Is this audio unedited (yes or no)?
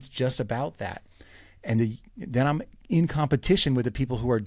no